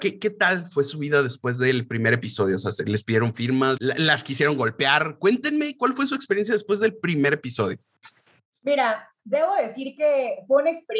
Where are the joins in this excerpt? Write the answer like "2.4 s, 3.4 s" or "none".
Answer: 3.8 s